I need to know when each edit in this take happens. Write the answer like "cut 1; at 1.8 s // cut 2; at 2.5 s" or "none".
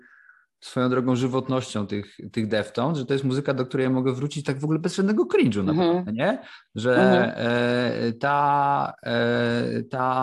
none